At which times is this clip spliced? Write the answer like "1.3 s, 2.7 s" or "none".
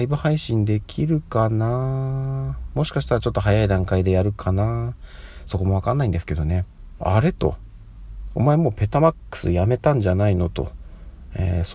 7.0 s